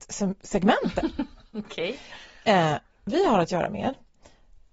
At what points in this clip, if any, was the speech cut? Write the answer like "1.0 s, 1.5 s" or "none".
none